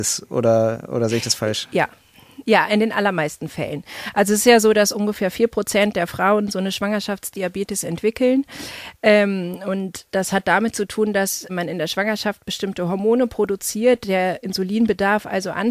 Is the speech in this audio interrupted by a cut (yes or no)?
yes